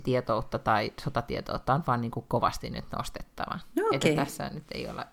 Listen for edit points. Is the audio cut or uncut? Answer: uncut